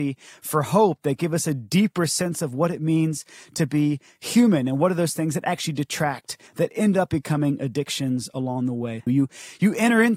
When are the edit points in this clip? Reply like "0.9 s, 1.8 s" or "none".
6.5 s, 9.1 s